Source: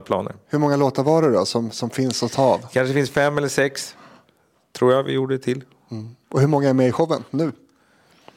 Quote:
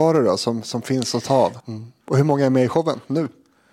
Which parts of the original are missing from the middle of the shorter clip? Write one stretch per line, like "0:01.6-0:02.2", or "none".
0:02.7-0:05.8